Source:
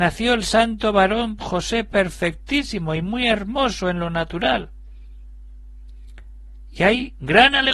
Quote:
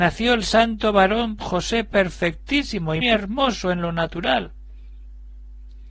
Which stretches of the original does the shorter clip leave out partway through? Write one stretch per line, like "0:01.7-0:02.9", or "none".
0:03.0-0:03.2